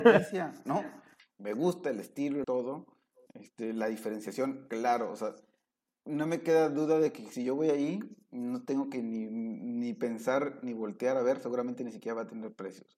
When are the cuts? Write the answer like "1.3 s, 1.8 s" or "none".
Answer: 1.2 s, 2.4 s